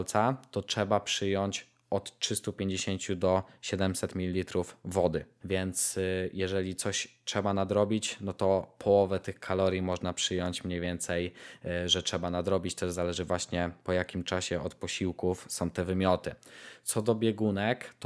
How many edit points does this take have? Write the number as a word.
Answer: one